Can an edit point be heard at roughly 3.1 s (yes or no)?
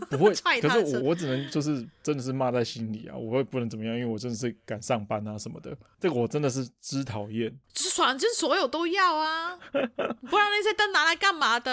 no